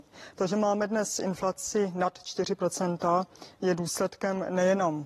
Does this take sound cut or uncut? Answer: uncut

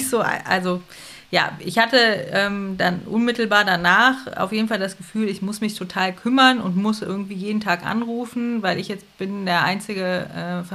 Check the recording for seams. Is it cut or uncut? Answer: uncut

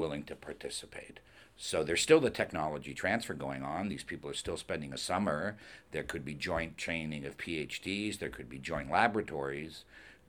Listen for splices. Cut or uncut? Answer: uncut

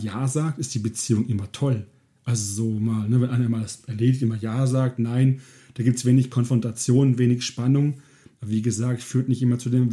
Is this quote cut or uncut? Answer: uncut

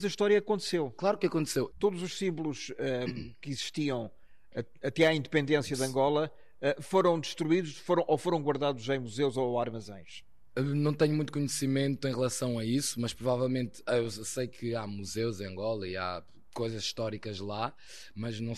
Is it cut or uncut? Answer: cut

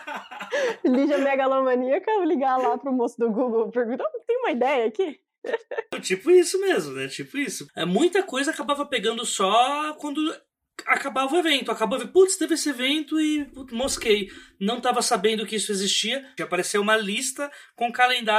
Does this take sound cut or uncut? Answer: cut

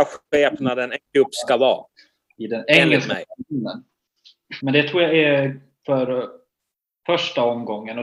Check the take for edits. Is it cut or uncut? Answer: cut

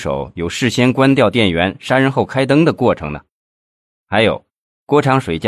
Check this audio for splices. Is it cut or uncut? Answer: uncut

